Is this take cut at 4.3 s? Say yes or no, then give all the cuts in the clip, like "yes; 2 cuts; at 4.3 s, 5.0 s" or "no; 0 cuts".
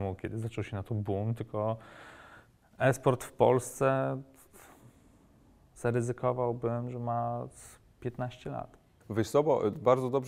no; 1 cut; at 9.0 s